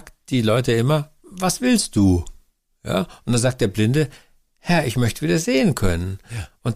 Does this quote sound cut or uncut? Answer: uncut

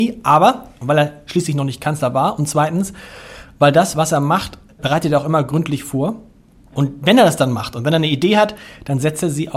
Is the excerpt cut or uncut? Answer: uncut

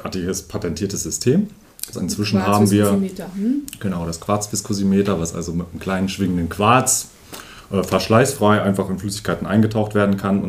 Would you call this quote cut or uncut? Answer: cut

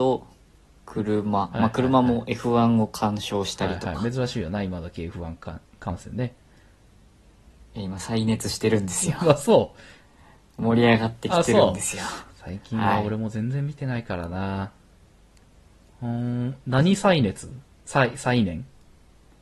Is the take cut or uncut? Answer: uncut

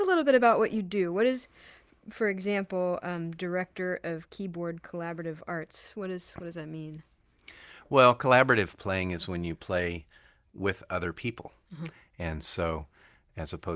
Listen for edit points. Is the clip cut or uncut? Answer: uncut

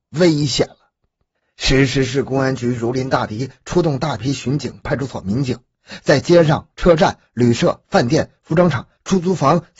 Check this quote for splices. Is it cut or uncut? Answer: cut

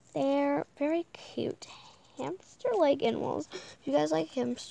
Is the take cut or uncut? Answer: uncut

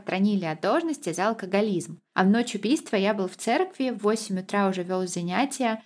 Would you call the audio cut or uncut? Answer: cut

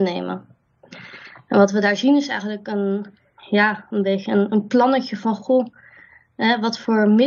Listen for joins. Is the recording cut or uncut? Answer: uncut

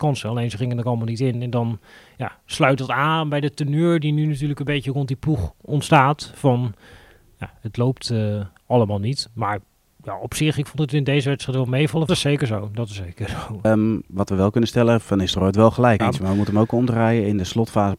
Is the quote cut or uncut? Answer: cut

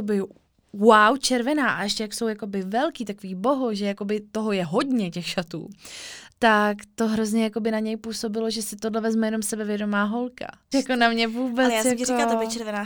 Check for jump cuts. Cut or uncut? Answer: cut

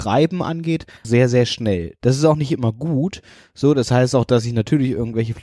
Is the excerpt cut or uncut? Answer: cut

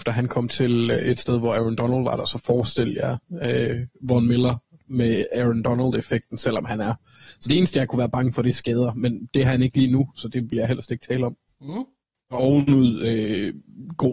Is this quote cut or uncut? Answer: cut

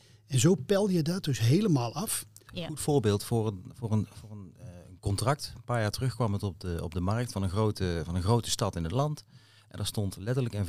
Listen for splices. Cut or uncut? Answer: cut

